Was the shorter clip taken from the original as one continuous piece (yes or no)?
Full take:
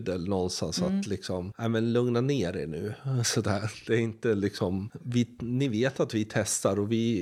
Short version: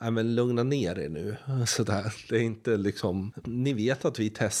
no